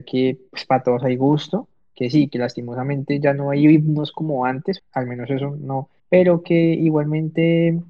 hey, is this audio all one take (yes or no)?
no